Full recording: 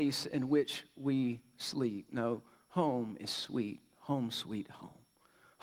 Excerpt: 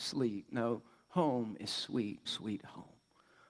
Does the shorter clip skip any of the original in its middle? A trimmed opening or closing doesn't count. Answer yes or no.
yes